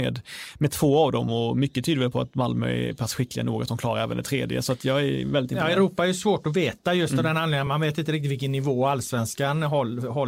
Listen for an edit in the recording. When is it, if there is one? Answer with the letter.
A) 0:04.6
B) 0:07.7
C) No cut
C